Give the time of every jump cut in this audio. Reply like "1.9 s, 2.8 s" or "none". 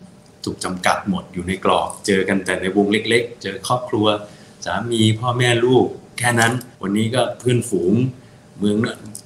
6.7 s